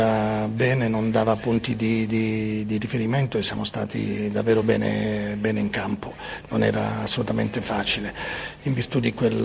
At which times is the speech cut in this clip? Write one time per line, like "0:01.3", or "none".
none